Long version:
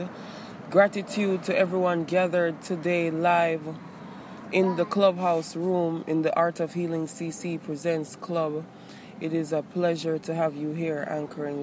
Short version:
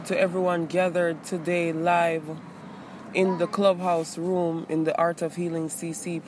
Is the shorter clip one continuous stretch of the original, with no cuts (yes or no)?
yes